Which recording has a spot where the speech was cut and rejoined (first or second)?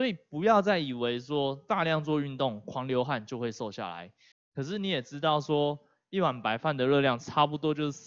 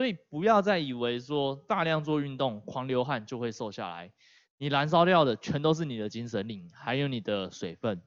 first